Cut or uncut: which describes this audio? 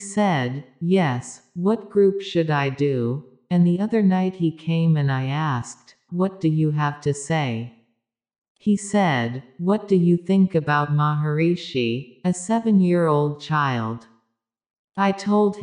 cut